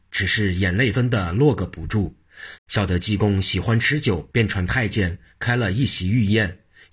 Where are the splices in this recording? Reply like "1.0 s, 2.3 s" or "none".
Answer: 0.9 s, 2.6 s, 4.3 s

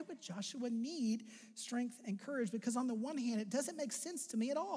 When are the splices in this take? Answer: none

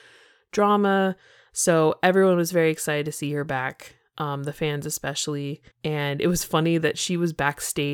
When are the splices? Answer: 5.7 s

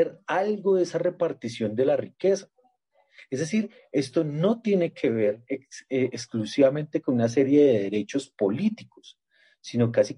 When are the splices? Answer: none

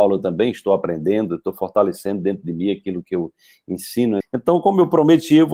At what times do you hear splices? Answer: 4.2 s

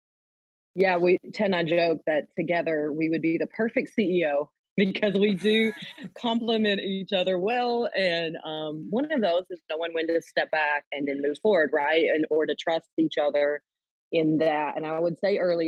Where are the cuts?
10.8 s

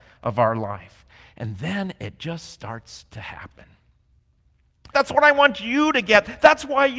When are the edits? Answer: 4.9 s

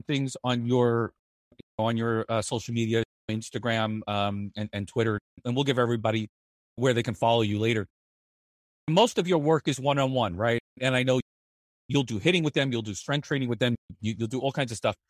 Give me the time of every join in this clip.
none

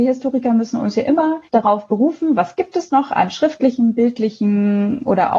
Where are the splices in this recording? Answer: 1.5 s

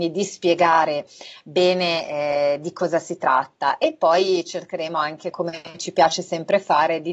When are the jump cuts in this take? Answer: 5.3 s

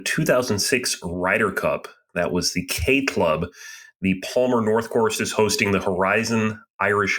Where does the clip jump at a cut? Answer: none

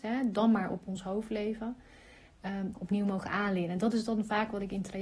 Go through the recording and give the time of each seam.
2.7 s

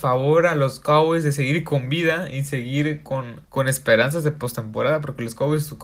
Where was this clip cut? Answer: 3.4 s

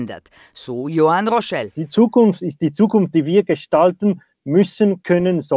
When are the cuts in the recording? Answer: none

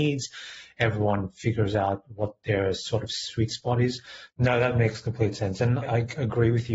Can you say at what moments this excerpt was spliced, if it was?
4.3 s, 5.8 s

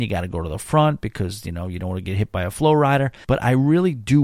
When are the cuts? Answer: 3.2 s

